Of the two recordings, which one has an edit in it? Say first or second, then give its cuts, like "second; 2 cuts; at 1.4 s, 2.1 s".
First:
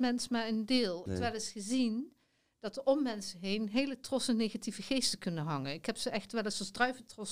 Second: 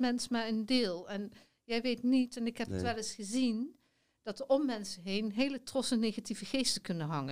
first; 1 cut; at 1.1 s